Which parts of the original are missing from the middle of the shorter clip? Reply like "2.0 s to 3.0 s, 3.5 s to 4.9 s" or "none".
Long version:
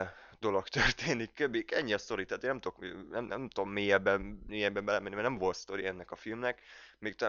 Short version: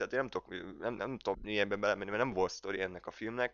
3.7 s to 4.4 s